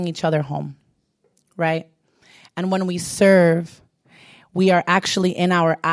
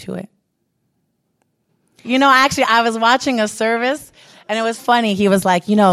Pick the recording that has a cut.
second; 2 cuts; at 2.0 s, 4.8 s

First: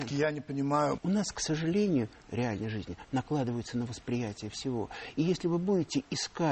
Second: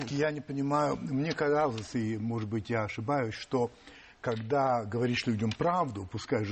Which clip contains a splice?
first; 2 cuts; at 1.0 s, 2.2 s

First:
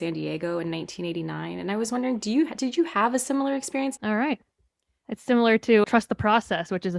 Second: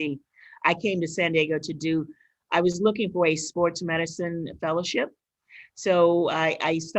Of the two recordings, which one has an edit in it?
first; 2 cuts; at 4.0 s, 5.8 s

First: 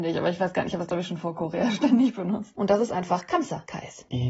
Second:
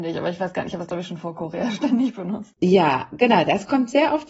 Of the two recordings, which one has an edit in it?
first; 1 cut; at 2.5 s

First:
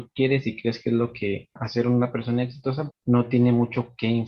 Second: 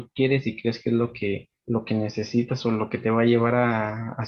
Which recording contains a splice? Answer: first; 2 cuts; at 1.6 s, 2.9 s

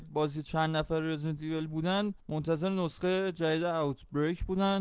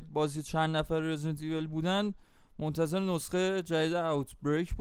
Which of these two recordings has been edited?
first; 1 cut; at 2.2 s

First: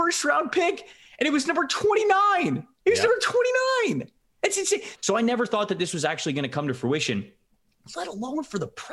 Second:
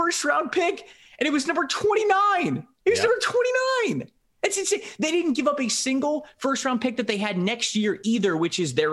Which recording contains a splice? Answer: first; 1 cut; at 4.9 s

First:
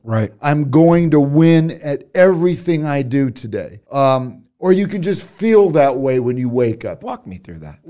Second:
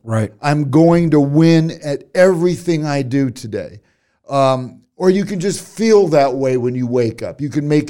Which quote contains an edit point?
first; 2 cuts; at 3.8 s, 7.0 s

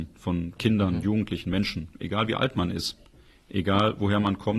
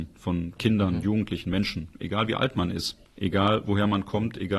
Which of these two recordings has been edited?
second; 1 cut; at 3.1 s

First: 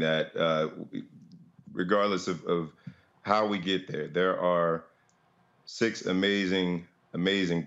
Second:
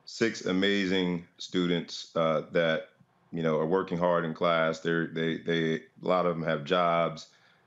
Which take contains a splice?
second; 1 cut; at 1.3 s

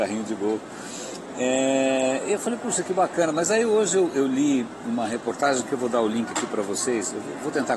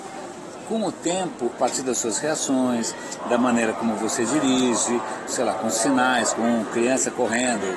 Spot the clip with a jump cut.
second; 3 cuts; at 1.5 s, 5.3 s, 6.3 s

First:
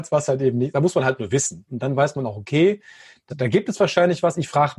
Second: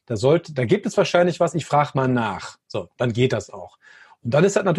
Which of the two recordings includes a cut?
first; 2 cuts; at 1.7 s, 3.3 s

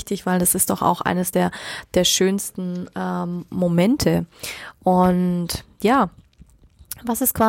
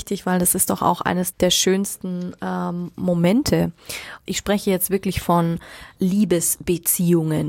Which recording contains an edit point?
second; 3 cuts; at 1.3 s, 4.3 s, 6.0 s

